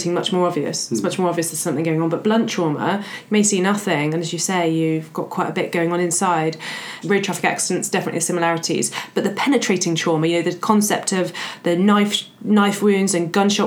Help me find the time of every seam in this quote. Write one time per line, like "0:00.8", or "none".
0:07.0